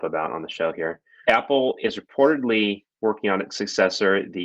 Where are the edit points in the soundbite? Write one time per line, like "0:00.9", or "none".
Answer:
0:01.2
0:02.9